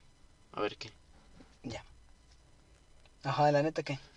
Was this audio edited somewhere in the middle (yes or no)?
no